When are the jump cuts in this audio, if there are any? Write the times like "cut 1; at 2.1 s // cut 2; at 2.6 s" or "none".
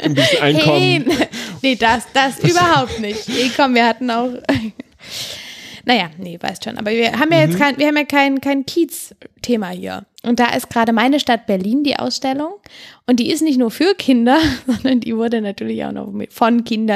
cut 1; at 10.2 s